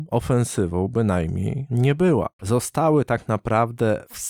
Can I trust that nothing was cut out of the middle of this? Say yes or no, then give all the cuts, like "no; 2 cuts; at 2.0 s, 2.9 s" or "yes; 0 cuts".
no; 1 cut; at 2.4 s